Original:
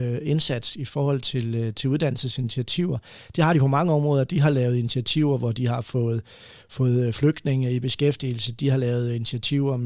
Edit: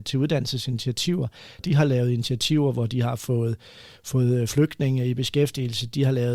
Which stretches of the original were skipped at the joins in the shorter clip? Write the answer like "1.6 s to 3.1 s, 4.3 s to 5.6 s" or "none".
3.3 s to 4.2 s

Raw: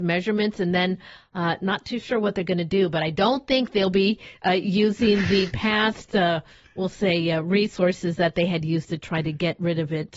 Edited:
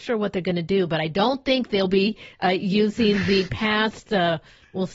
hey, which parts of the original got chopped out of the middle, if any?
none

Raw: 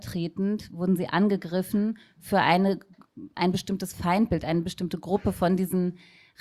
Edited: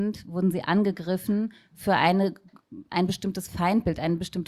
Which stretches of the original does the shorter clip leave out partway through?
none

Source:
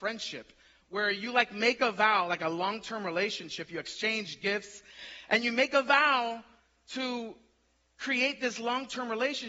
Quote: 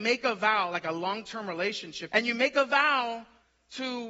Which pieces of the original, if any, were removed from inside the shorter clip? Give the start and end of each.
3.7 s to 5.3 s

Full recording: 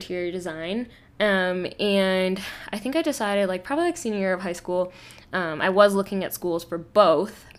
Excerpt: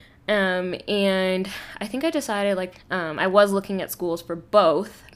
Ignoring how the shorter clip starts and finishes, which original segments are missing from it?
3.6 s to 5.1 s

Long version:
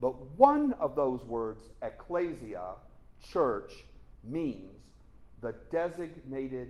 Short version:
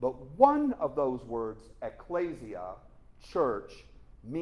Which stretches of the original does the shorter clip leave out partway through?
none

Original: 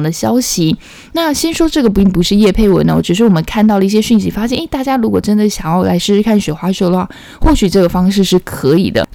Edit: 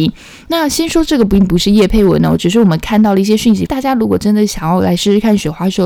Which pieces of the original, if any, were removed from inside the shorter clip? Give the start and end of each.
4.3 s to 4.7 s

